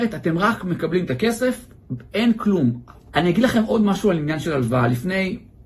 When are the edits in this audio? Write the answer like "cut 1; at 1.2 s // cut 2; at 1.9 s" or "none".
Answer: cut 1; at 3.1 s